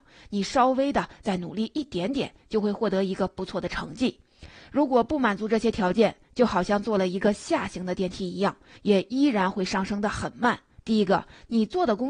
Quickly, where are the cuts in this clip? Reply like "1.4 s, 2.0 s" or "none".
8.8 s, 10.8 s